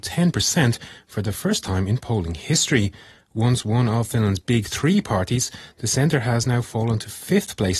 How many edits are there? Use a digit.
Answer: 0